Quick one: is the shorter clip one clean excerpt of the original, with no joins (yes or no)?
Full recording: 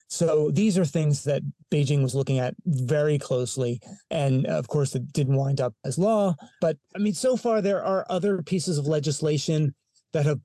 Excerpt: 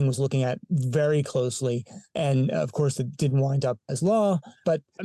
yes